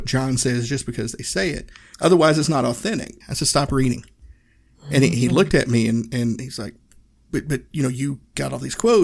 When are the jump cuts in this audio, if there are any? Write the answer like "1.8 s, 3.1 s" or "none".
1.9 s, 3.2 s